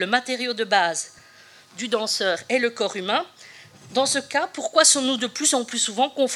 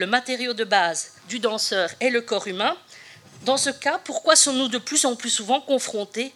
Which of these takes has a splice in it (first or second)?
second